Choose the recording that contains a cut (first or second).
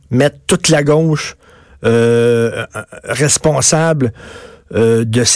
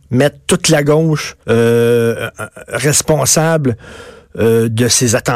second